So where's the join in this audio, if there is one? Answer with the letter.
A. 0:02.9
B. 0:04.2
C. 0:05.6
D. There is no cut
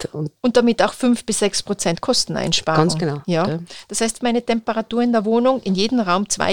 B